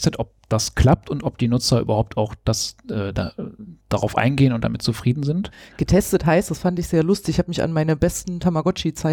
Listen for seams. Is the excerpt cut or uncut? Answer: uncut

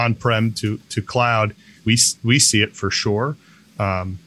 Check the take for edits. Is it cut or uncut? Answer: cut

